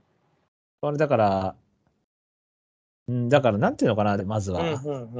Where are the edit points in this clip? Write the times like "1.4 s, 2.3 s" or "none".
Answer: 4.2 s